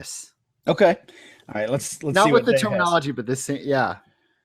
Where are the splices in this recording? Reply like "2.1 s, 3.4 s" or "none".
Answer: none